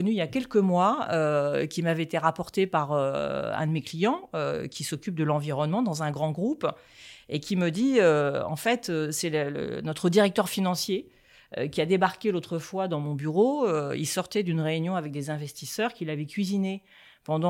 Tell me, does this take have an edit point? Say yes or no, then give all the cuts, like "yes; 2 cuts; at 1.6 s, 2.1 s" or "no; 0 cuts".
no; 0 cuts